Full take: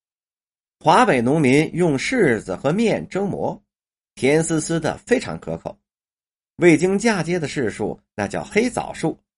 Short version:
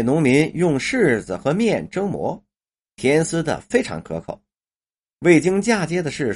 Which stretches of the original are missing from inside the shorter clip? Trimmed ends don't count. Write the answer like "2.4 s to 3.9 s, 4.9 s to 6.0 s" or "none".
4.4 s to 4.6 s

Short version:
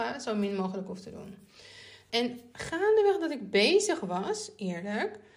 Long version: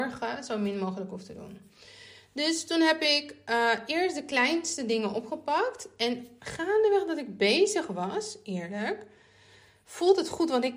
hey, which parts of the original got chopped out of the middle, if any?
2.3 s to 6.0 s

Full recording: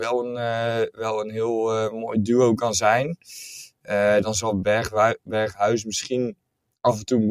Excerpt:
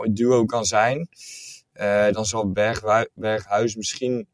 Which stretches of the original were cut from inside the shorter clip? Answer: none

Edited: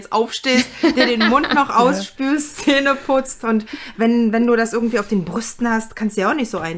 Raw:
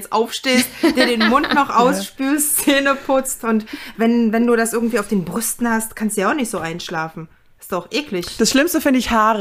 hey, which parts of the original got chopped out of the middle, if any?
none

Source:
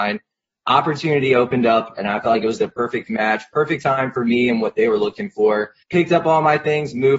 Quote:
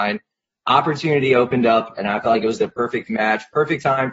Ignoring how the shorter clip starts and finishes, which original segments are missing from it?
none

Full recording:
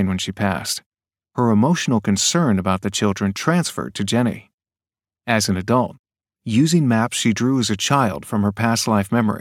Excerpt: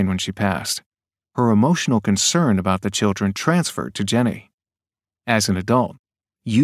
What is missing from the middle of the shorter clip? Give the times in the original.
none

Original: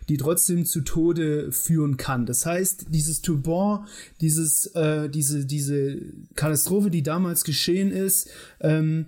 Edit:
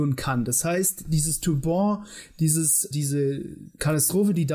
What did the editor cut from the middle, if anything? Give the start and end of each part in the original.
4.7 s to 5.5 s

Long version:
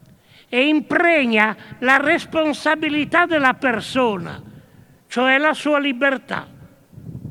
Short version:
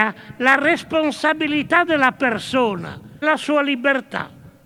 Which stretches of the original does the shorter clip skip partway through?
4.6 s to 5.4 s

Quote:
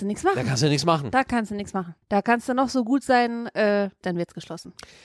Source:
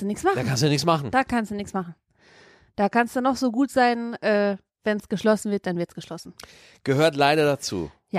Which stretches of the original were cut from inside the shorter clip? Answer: 2.0 s to 2.7 s, 4.7 s to 5.6 s

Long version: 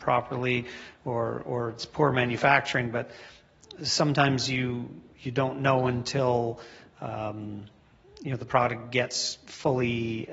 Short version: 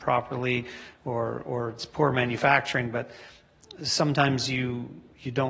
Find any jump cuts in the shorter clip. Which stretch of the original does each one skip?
none

